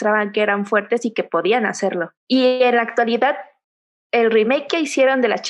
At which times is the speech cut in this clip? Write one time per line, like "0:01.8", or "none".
0:02.2